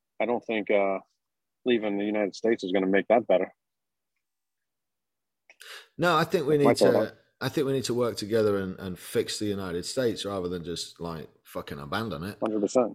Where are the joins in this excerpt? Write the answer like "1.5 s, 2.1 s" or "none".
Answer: 8.8 s